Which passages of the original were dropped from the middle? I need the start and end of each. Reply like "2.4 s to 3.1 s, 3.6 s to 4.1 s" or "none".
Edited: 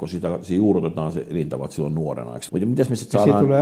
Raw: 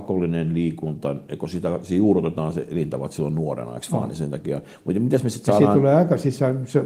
3.9 s to 4.8 s